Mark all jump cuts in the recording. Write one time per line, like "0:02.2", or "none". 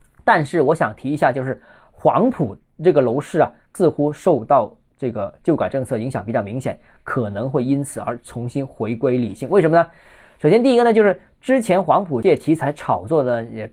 none